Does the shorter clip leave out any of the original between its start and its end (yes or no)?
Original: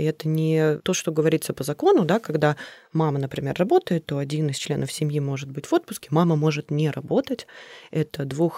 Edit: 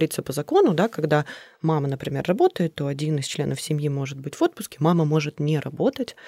no